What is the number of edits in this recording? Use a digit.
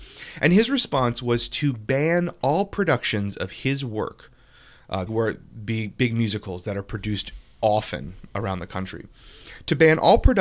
1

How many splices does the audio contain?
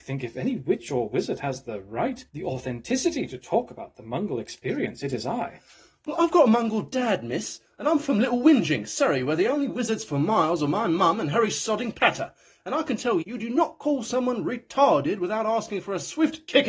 2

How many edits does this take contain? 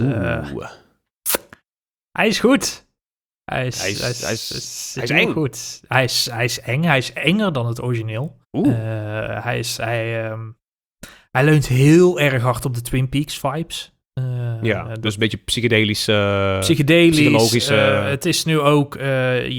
1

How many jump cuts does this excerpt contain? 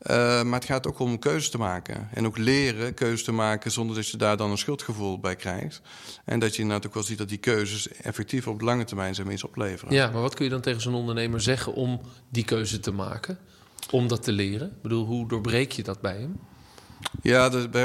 0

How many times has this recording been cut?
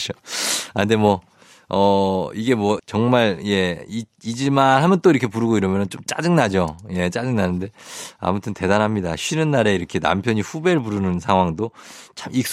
1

